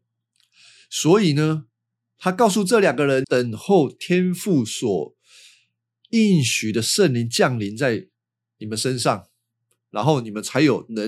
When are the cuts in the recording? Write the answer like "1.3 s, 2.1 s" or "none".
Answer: 3.2 s